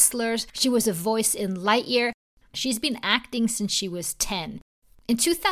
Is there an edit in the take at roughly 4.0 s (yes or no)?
no